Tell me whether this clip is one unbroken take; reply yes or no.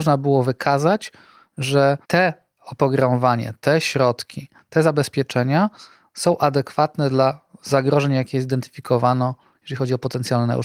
no